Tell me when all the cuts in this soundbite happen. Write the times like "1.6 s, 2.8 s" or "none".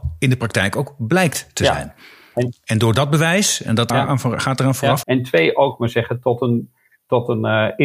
3.9 s, 5.0 s